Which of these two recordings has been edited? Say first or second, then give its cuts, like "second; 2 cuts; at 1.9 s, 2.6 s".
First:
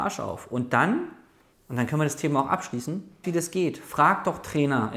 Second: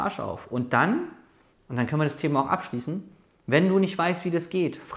first; 1 cut; at 3.2 s